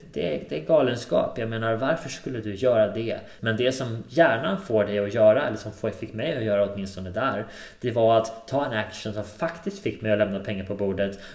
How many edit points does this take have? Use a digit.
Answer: 1